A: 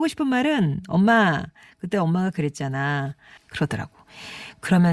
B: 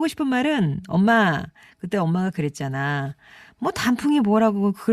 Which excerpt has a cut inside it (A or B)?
A